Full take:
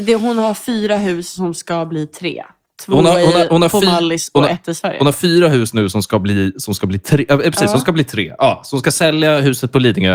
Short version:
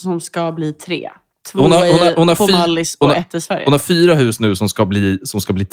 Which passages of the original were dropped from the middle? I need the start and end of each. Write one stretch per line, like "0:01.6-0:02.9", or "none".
none